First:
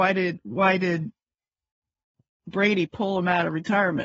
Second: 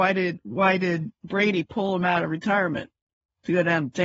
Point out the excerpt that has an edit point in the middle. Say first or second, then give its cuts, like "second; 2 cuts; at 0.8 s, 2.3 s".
second; 1 cut; at 1.2 s